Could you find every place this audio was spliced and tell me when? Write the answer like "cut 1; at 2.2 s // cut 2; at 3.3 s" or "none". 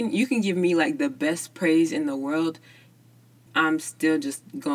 cut 1; at 3.5 s